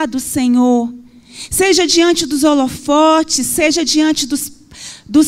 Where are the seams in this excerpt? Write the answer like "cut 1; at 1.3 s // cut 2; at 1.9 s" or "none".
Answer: none